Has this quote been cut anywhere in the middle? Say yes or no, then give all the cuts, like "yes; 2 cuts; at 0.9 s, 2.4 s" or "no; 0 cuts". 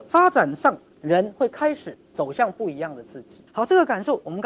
yes; 1 cut; at 3.5 s